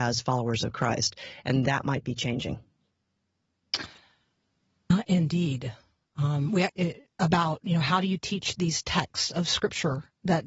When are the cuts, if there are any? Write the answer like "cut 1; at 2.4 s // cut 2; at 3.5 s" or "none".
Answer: cut 1; at 6.7 s